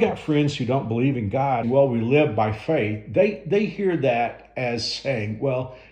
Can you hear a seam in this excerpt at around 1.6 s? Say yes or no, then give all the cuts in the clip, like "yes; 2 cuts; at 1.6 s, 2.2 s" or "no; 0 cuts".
yes; 1 cut; at 1.6 s